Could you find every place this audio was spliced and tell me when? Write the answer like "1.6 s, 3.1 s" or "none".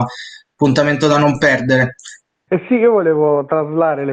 2.5 s